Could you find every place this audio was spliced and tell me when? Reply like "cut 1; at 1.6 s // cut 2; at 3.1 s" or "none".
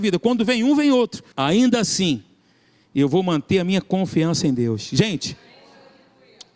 cut 1; at 1.3 s